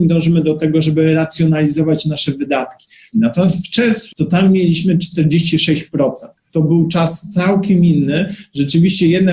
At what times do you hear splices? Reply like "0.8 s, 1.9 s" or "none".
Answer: 3.1 s, 4.1 s